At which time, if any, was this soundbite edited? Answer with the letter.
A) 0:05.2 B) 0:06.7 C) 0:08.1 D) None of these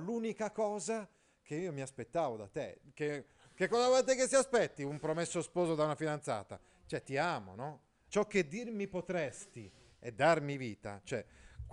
C